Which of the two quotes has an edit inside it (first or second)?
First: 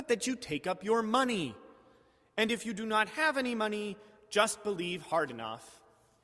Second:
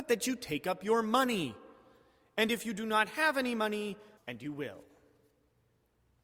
second